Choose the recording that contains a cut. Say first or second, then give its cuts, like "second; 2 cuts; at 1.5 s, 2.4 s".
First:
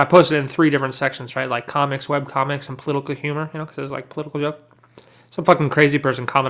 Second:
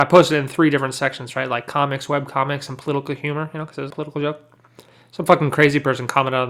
second; 1 cut; at 3.9 s